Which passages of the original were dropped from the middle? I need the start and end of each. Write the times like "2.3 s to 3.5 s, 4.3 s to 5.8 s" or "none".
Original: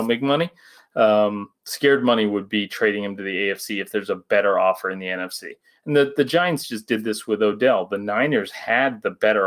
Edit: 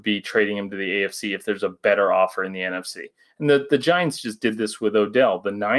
none